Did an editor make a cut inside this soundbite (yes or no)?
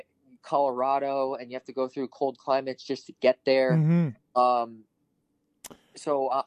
no